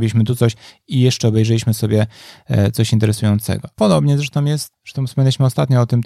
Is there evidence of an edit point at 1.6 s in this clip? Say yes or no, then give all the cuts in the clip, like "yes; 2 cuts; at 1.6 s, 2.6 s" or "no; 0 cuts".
no; 1 cut; at 3.7 s